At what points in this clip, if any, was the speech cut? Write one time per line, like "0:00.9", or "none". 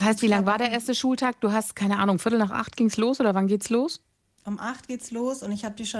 none

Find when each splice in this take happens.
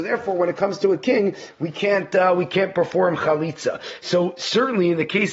none

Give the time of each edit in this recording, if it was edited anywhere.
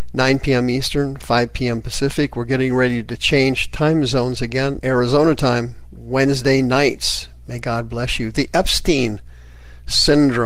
0:04.8

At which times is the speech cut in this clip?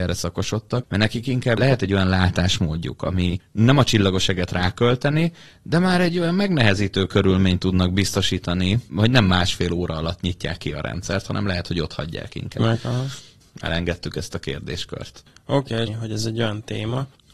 0:12.6
0:15.9

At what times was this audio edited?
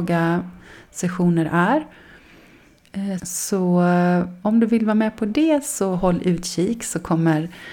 0:03.2

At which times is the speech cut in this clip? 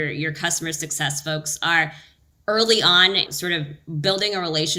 0:03.3

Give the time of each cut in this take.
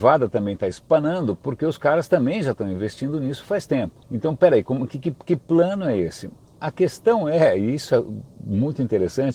0:04.0

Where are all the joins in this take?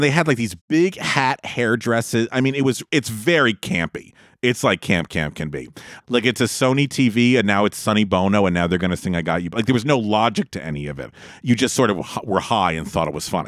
0:02.9
0:06.0

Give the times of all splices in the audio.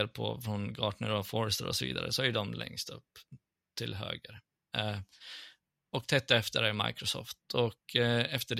none

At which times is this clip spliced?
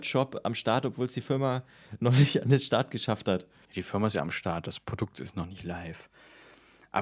0:03.6

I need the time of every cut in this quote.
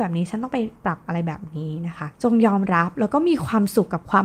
none

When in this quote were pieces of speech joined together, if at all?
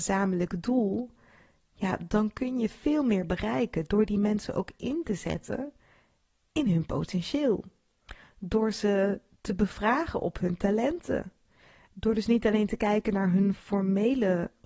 none

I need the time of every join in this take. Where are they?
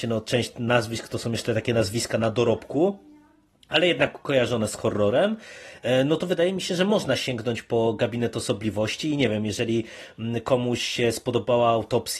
none

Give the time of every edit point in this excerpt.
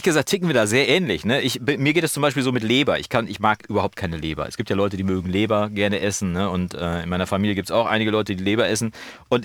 none

